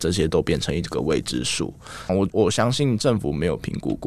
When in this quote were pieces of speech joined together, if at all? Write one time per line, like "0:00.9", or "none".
0:02.1